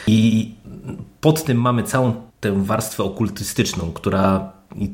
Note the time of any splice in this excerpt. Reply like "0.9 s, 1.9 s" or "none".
2.3 s